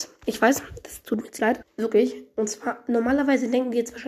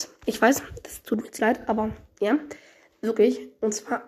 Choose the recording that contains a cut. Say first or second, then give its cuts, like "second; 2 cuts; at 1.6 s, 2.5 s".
first; 1 cut; at 1.6 s